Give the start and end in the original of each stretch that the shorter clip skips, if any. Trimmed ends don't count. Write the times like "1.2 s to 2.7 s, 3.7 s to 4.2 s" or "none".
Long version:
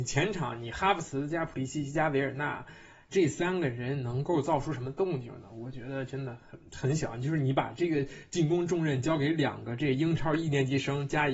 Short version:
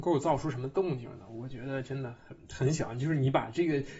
none